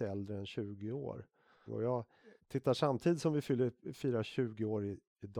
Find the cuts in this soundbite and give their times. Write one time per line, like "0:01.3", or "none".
0:01.7

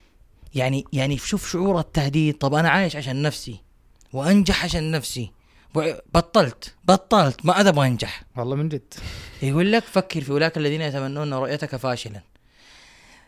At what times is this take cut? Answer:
0:01.2
0:06.8
0:08.3

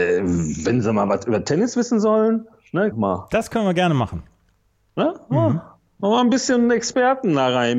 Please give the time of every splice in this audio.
0:02.9

